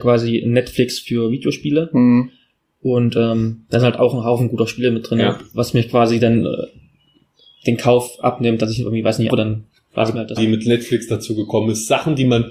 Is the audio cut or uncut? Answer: cut